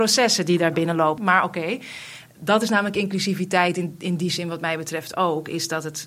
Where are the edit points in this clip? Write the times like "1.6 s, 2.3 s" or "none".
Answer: 1.2 s

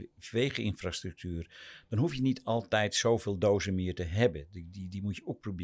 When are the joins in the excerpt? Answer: none

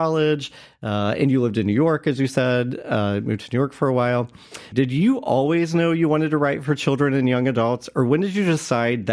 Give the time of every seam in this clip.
4.7 s

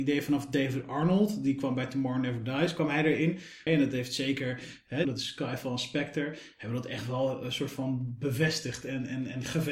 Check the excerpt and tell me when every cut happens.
3.7 s, 5.0 s

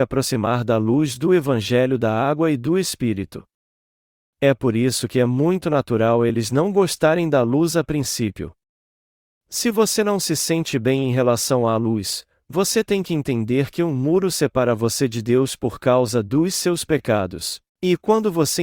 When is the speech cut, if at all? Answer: 17.7 s

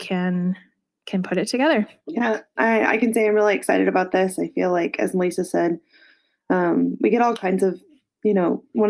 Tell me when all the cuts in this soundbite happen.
none

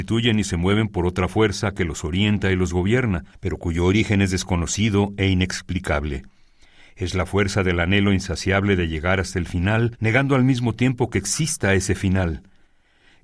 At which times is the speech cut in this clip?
none

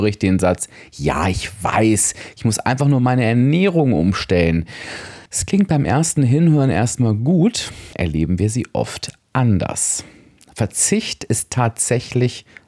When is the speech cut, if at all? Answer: 5.3 s, 7.9 s

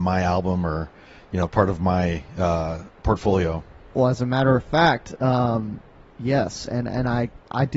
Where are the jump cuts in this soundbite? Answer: none

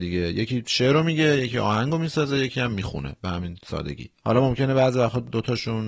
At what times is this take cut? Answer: 4.2 s

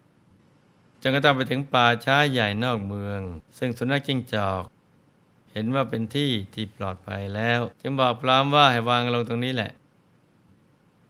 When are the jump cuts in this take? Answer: 3.5 s, 7.8 s

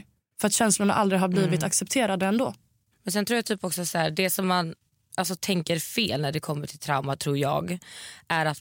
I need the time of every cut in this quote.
none

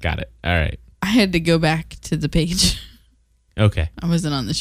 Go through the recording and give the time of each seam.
none

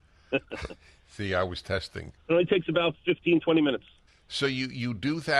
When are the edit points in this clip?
2.2 s, 4.1 s

